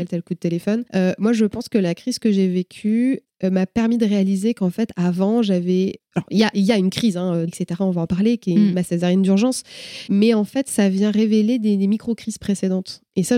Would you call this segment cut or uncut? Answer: cut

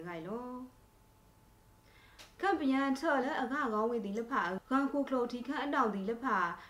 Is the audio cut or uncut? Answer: cut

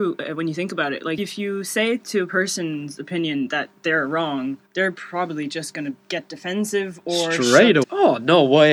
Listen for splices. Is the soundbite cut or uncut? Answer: cut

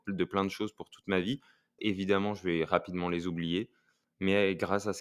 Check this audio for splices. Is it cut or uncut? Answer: cut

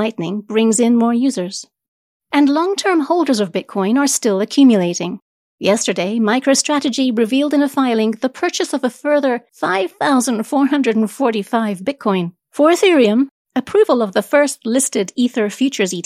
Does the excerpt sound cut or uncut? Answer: cut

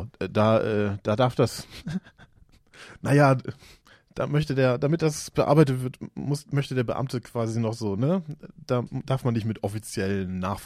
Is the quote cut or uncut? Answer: uncut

